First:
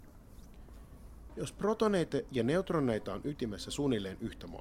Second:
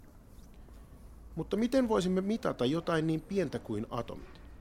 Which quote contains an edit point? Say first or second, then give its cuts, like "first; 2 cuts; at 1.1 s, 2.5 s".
first; 1 cut; at 1.3 s